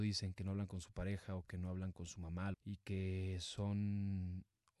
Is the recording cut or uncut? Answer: cut